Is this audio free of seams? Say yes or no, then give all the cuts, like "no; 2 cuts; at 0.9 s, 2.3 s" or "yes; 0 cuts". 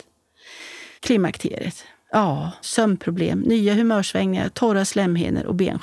no; 2 cuts; at 1.0 s, 2.6 s